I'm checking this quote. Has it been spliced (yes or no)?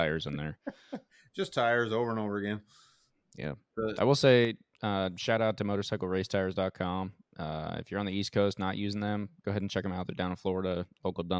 no